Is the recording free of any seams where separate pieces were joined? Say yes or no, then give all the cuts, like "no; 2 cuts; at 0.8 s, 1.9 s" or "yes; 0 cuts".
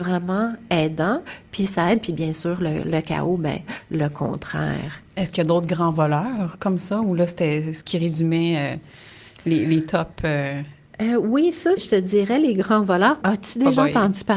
no; 3 cuts; at 5.1 s, 11.8 s, 13.2 s